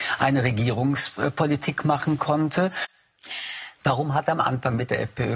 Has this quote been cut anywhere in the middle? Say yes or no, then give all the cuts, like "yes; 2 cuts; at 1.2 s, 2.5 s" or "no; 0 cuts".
yes; 1 cut; at 3.8 s